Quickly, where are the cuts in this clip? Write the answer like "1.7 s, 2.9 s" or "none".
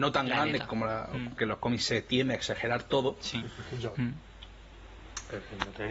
1.4 s, 3.9 s